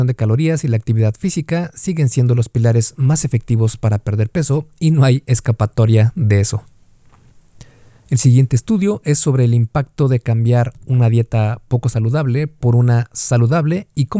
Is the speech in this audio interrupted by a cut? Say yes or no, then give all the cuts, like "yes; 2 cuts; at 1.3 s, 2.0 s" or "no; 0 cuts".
no; 0 cuts